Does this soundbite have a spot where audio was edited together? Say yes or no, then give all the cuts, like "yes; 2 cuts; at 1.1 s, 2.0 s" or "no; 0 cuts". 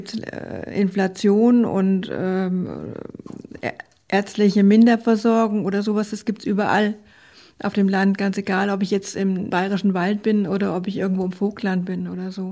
no; 0 cuts